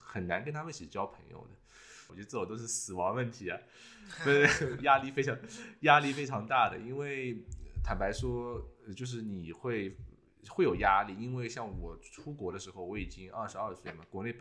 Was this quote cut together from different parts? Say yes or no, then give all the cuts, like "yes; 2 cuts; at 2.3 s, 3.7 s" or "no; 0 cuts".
yes; 1 cut; at 2.1 s